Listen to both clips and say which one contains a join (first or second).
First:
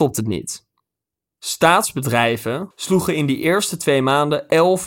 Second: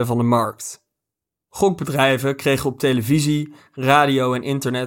first